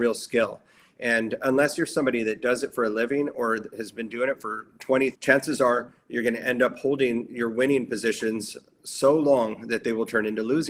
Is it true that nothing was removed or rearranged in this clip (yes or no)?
no